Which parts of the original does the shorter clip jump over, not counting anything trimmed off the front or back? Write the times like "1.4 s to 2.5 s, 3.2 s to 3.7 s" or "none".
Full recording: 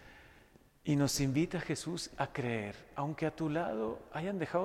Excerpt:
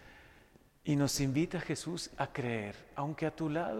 none